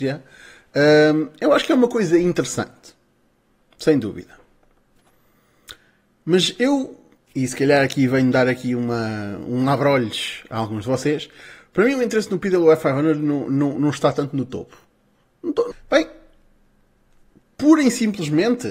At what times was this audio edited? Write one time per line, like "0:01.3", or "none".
0:15.7